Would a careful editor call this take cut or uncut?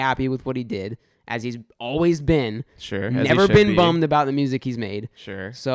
uncut